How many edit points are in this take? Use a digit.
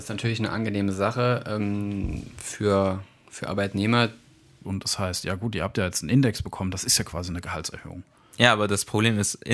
1